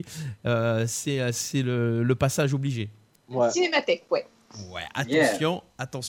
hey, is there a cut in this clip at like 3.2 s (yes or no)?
yes